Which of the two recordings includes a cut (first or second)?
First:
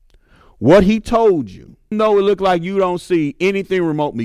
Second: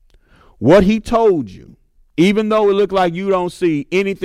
first